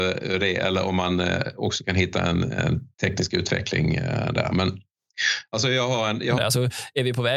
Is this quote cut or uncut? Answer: cut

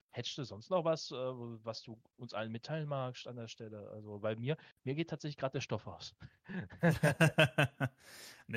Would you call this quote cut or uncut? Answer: uncut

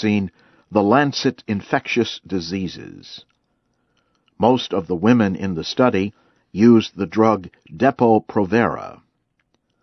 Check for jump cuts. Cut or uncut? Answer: uncut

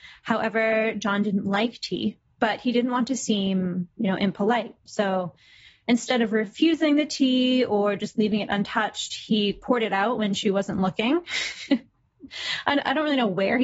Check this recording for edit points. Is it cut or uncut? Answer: uncut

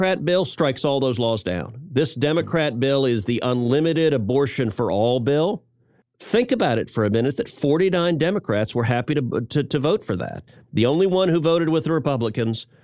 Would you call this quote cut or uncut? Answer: uncut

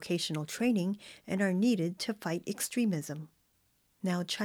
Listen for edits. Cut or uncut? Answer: uncut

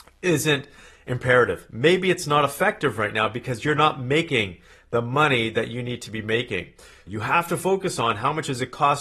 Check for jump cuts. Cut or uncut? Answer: cut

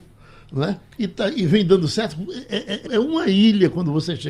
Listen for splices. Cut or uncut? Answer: cut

